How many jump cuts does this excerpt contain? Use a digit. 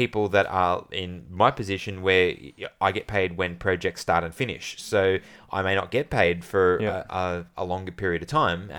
0